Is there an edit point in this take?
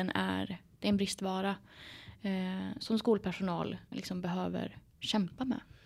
yes; 2 cuts; at 2.8 s, 3.9 s

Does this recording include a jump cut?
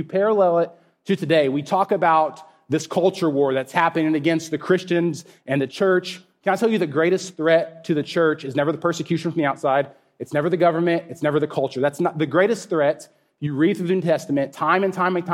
no; 0 cuts

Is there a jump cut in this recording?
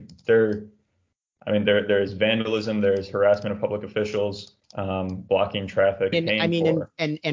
yes; 2 cuts; at 4.6 s, 6.1 s

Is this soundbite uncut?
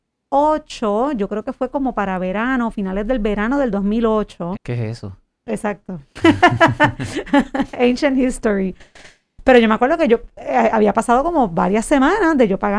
no; 1 cut; at 4.6 s

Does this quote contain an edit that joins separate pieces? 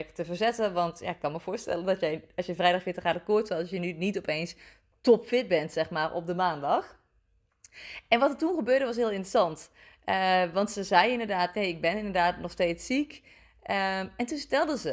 no; 0 cuts

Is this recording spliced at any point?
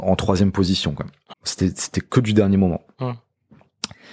yes; 1 cut; at 1.3 s

